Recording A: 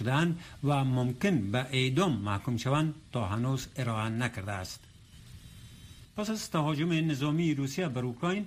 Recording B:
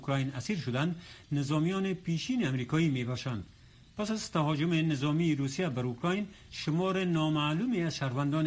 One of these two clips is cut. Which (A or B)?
A